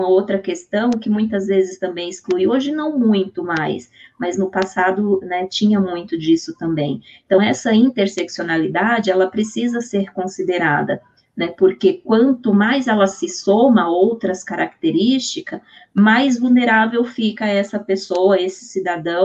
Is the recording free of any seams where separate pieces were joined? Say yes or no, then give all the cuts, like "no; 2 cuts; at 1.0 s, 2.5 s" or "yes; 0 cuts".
yes; 0 cuts